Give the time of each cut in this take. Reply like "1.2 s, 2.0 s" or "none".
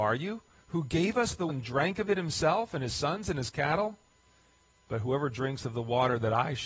1.5 s, 4.9 s